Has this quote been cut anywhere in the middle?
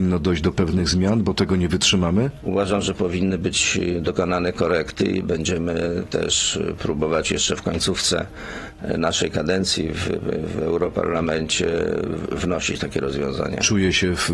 no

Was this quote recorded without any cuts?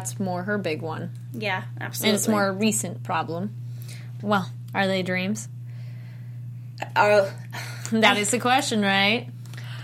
no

